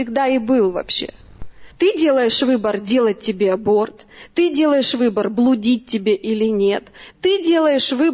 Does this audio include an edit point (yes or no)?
yes